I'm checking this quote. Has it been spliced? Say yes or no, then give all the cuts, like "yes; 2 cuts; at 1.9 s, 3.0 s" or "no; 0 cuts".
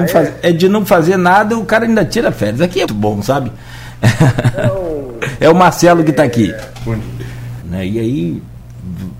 yes; 2 cuts; at 2.9 s, 7.6 s